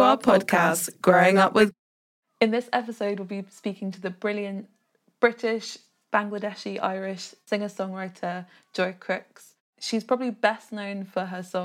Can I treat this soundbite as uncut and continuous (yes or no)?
no